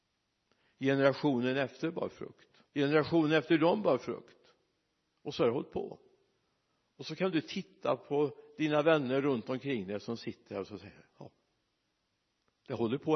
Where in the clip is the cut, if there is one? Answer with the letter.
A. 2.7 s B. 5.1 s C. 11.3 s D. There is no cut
A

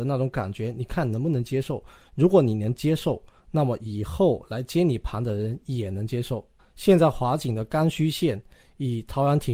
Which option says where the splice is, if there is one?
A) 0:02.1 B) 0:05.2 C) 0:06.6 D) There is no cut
C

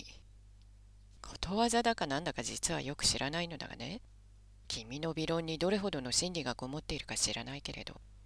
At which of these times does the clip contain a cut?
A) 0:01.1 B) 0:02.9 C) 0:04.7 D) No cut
C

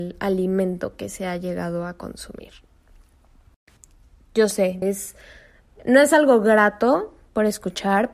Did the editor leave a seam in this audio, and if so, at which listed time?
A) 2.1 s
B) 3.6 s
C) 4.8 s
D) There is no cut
C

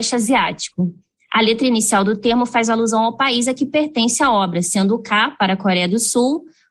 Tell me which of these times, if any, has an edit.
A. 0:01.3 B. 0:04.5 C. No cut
C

